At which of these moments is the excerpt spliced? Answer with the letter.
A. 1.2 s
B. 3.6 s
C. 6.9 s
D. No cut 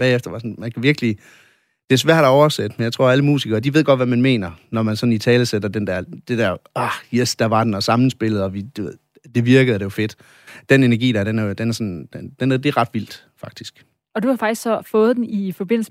B